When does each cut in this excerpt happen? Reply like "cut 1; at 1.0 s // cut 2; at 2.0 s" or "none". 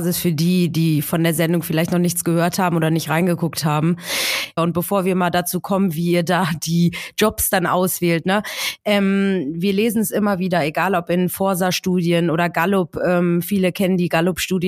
cut 1; at 4.6 s